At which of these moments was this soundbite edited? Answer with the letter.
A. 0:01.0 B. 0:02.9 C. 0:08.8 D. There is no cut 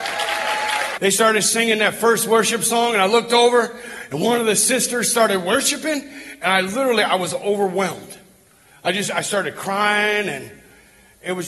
A